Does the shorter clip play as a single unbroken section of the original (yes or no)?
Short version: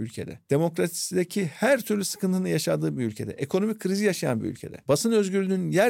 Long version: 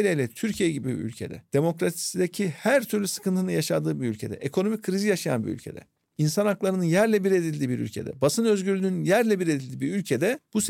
no